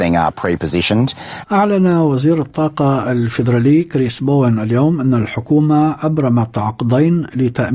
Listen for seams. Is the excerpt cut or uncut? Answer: cut